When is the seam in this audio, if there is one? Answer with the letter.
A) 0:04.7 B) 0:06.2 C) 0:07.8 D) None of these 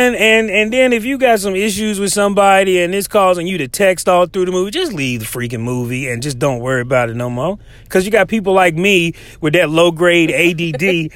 D